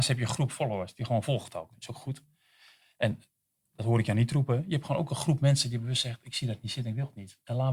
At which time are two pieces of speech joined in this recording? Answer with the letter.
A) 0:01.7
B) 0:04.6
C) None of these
C